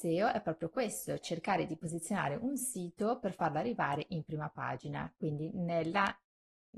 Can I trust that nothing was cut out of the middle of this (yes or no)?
no